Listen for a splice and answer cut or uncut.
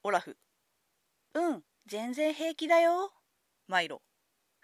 cut